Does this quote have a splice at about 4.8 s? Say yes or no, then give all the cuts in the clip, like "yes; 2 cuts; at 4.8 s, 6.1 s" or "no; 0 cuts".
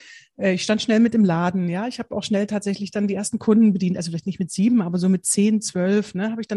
no; 0 cuts